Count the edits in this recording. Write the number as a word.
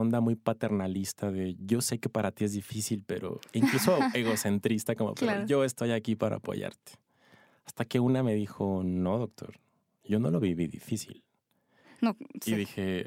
zero